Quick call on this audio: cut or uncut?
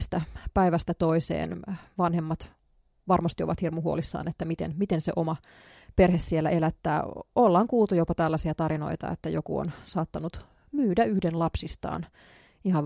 uncut